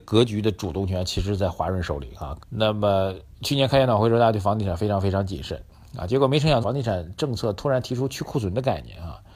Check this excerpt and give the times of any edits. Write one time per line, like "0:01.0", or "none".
0:02.4
0:06.6